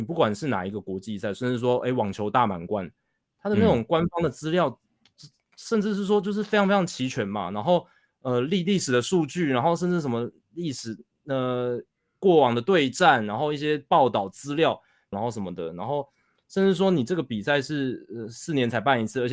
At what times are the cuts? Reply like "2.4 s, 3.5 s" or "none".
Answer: 15.1 s